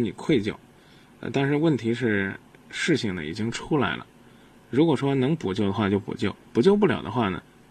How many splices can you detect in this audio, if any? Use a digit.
0